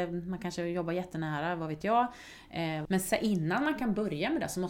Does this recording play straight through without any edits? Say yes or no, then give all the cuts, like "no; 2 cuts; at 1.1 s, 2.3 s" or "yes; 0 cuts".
no; 1 cut; at 2.9 s